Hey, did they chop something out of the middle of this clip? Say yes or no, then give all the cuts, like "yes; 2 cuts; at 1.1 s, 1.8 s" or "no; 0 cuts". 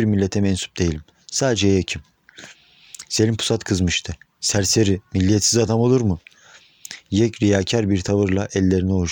no; 0 cuts